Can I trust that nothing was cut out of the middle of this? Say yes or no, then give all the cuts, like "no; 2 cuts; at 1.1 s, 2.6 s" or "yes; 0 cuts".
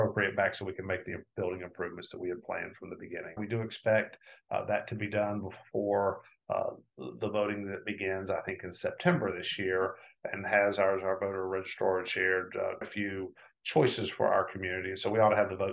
no; 2 cuts; at 3.4 s, 12.8 s